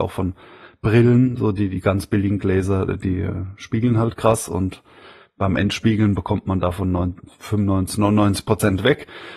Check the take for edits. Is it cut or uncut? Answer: uncut